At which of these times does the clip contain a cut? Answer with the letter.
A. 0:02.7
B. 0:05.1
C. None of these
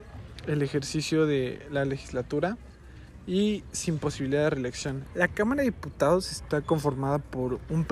B